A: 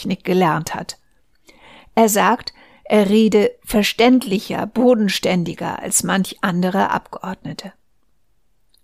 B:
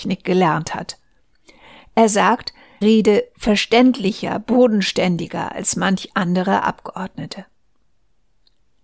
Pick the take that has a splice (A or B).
B